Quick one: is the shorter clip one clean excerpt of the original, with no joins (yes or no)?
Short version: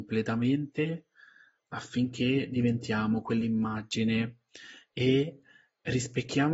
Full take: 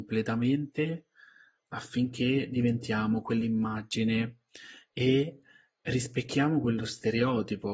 yes